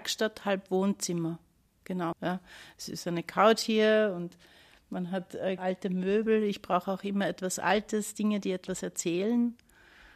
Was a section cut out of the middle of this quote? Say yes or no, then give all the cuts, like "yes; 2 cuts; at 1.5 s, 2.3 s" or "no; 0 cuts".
yes; 2 cuts; at 2.1 s, 5.6 s